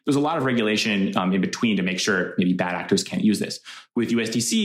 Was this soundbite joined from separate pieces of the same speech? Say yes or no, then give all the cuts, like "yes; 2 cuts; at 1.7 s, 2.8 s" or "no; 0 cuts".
no; 0 cuts